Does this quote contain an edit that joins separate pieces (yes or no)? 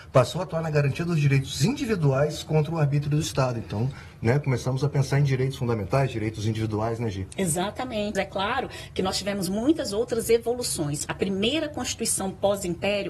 yes